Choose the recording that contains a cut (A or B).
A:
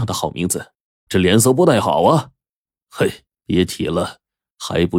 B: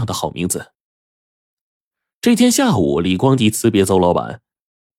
A